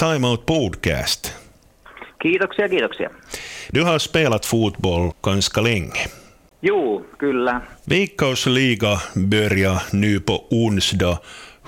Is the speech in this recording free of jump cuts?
no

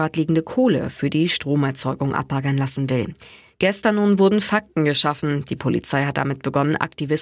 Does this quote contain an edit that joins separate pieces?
no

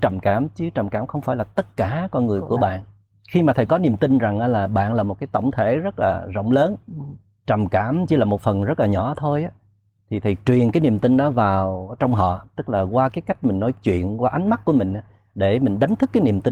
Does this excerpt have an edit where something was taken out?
no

